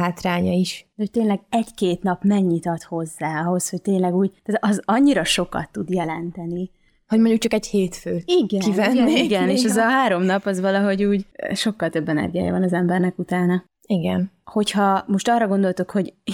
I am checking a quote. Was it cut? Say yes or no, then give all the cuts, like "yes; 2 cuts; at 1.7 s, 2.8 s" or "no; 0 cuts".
no; 0 cuts